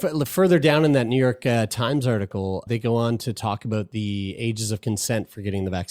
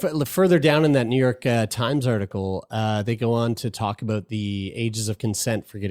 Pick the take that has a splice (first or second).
first